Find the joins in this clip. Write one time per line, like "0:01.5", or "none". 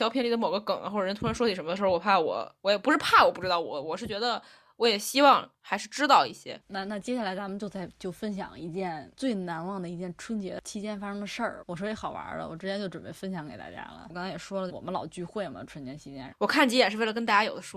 0:14.7
0:16.3